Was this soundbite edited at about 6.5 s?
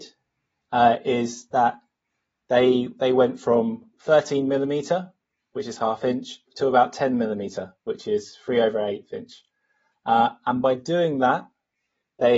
yes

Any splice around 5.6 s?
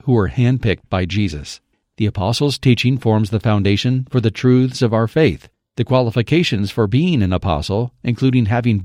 no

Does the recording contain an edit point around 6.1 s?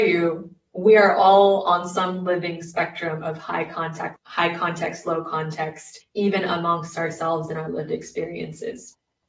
no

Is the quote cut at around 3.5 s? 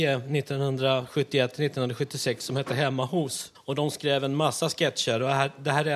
yes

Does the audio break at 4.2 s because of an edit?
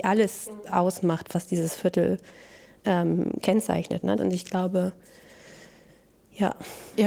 yes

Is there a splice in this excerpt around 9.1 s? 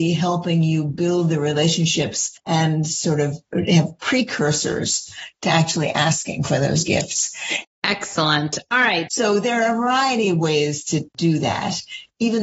yes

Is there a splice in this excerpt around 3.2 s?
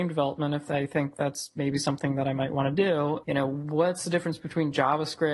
yes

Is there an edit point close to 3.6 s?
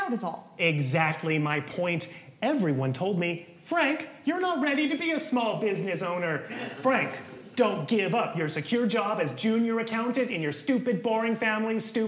no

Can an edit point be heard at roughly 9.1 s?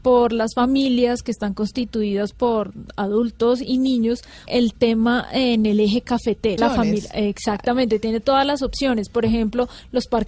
no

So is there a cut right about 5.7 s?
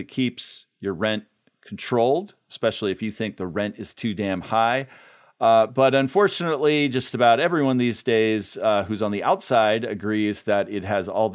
no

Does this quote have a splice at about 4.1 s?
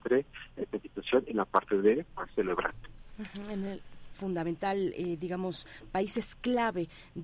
yes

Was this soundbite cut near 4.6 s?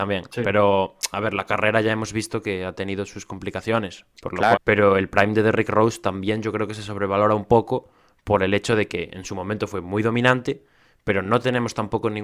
yes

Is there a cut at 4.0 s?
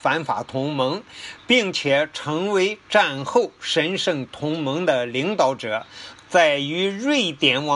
no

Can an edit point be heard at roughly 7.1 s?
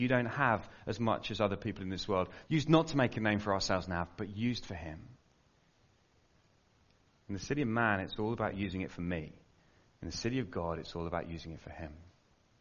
no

